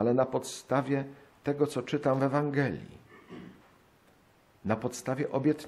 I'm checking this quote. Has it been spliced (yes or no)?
no